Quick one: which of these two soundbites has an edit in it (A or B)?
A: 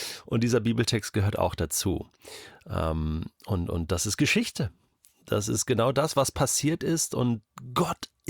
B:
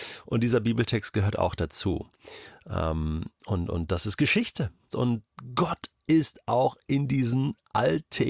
B